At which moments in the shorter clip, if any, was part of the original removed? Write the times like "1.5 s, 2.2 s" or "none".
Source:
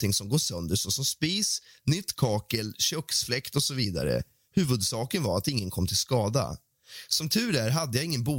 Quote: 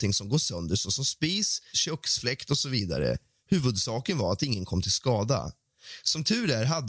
1.7 s